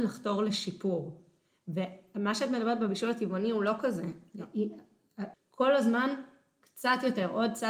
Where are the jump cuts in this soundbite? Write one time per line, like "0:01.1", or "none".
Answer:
0:05.3